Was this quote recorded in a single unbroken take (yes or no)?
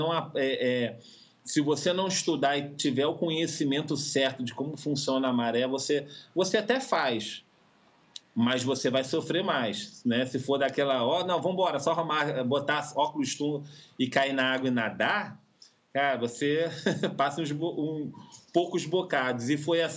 yes